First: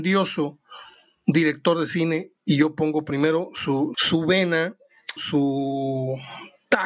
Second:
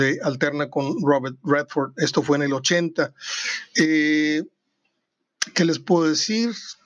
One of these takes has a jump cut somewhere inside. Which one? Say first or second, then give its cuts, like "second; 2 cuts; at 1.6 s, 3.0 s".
first; 3 cuts; at 2.4 s, 3.9 s, 5.2 s